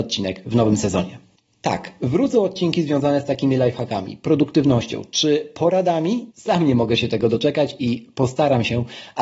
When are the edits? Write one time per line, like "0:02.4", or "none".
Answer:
0:06.3